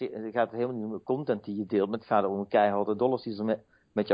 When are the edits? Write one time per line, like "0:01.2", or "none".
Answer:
none